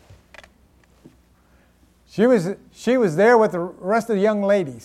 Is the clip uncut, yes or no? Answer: yes